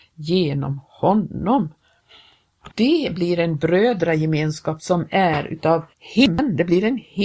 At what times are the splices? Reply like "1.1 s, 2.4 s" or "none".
2.7 s, 5.9 s